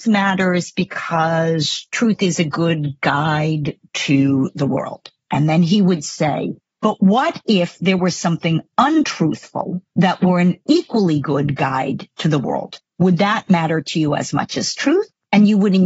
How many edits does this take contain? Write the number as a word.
zero